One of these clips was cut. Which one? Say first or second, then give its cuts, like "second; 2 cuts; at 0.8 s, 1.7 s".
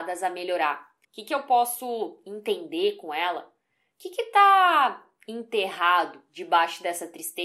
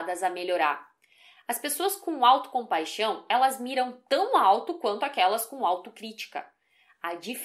first; 1 cut; at 1.0 s